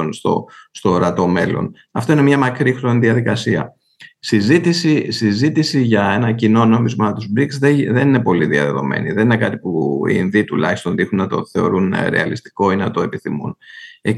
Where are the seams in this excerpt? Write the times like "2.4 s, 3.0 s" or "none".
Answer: none